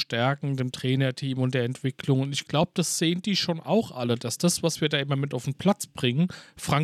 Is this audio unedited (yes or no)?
yes